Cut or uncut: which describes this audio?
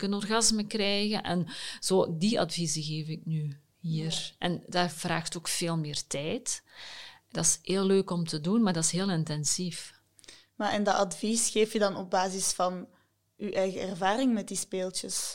uncut